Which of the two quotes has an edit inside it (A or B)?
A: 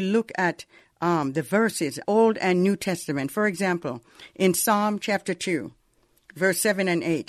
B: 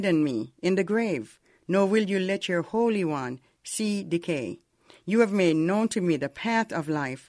A